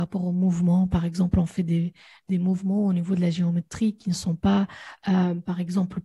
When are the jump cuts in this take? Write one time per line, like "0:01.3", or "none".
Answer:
none